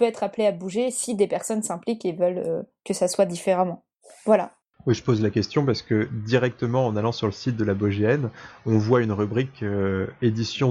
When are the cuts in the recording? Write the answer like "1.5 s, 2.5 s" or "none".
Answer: none